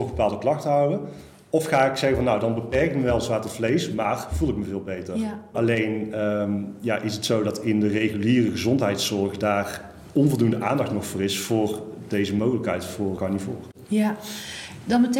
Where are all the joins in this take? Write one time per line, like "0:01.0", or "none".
0:05.5
0:13.2